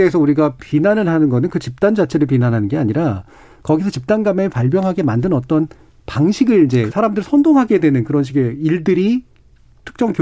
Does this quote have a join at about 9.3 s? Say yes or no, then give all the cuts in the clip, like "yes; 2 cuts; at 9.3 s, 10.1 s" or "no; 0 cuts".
no; 1 cut; at 6.9 s